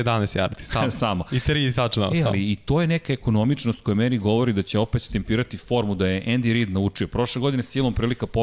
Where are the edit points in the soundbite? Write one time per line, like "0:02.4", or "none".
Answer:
none

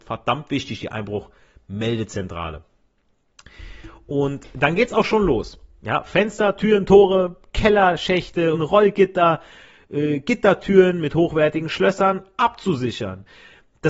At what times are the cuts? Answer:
0:08.5

